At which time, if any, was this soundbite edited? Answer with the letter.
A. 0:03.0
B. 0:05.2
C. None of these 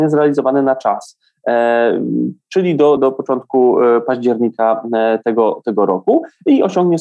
A